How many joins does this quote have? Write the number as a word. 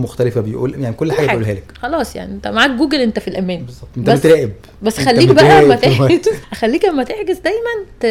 one